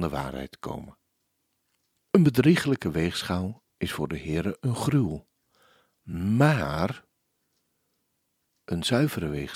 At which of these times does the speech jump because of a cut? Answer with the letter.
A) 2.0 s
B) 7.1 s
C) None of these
A